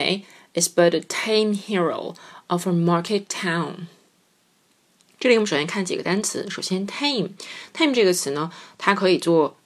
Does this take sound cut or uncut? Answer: uncut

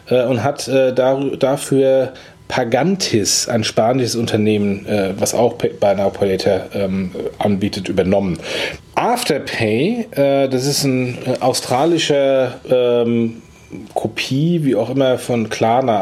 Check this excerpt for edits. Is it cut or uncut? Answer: cut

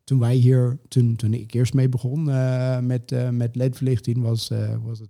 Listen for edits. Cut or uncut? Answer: uncut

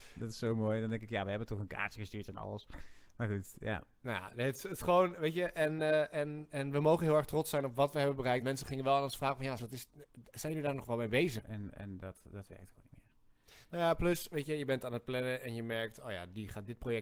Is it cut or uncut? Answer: cut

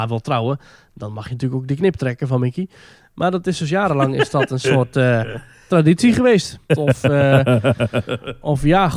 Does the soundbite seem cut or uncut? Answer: cut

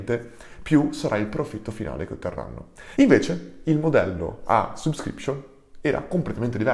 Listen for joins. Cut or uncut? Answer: cut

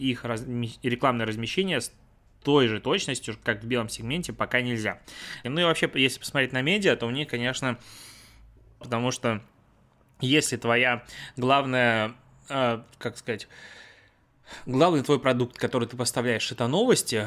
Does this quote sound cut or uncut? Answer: cut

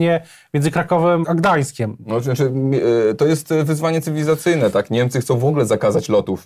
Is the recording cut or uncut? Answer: cut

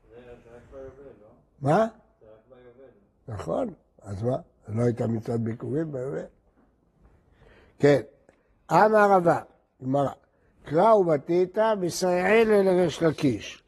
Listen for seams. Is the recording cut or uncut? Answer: uncut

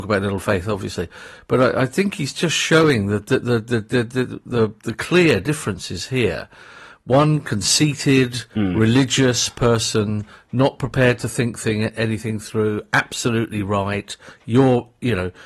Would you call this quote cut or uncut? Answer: uncut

